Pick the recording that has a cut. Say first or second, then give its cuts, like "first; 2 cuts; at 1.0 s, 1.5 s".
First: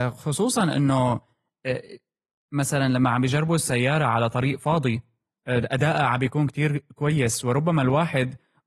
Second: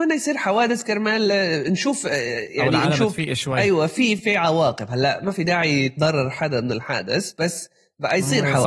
second; 1 cut; at 4.2 s